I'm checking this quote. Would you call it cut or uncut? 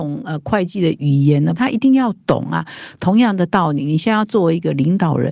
cut